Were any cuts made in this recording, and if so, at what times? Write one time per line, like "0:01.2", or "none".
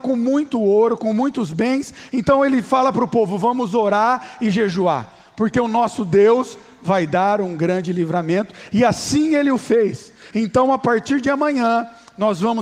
0:10.3